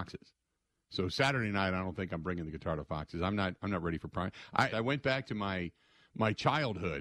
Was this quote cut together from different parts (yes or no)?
yes